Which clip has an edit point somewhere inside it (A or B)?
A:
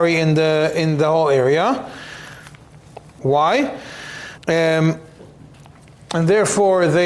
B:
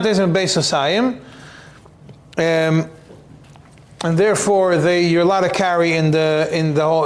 A